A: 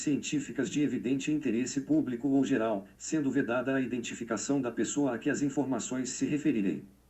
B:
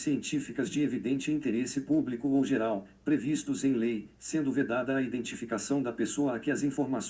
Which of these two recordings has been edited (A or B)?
A